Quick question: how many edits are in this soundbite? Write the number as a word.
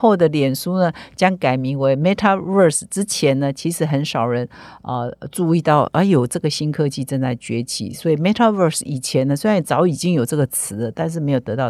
zero